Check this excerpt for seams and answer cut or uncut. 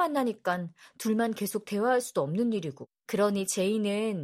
cut